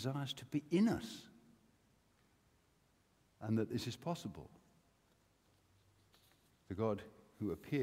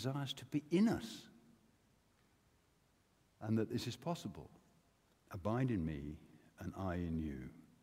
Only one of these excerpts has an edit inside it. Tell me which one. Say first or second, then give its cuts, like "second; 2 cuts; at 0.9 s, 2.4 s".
second; 1 cut; at 5.1 s